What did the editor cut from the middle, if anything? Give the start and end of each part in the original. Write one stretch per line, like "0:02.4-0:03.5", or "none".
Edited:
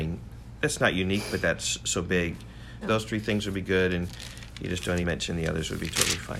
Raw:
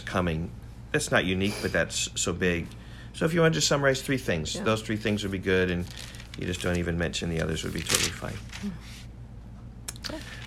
0:03.1-0:04.6
0:06.8-0:06.9